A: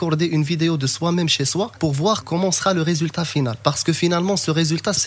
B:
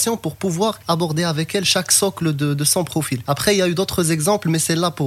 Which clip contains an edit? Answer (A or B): B